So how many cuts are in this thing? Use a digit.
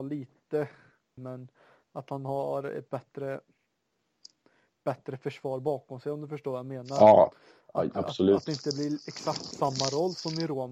1